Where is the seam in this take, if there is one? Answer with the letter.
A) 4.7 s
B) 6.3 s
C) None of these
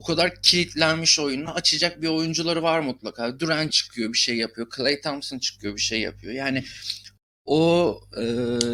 C